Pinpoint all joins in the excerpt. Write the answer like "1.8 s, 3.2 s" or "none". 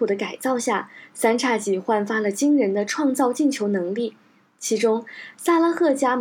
none

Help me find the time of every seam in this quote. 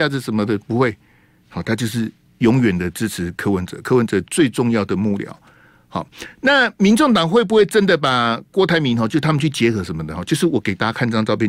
none

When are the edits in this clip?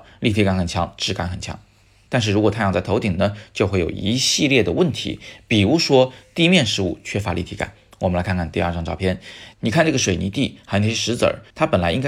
none

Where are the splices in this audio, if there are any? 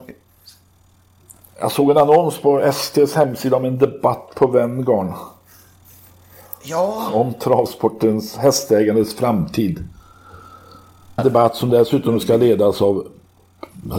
11.2 s

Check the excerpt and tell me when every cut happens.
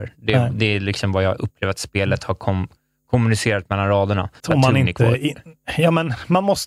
4.4 s

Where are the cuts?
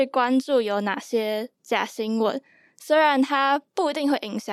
none

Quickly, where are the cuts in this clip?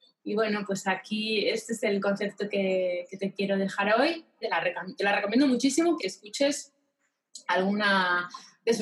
4.4 s, 6.0 s

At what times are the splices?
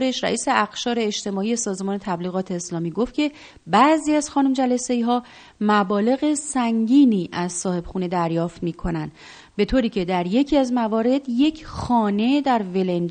none

